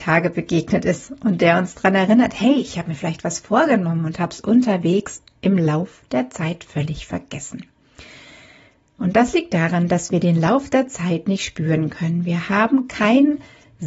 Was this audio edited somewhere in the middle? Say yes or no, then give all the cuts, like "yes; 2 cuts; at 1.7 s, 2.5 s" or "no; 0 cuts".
no; 0 cuts